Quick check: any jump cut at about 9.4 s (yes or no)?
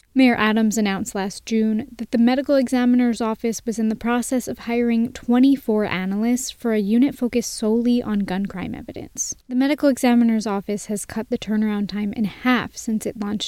yes